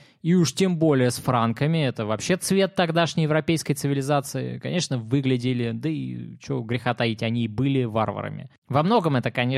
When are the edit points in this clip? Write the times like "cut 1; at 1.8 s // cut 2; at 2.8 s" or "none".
cut 1; at 8.6 s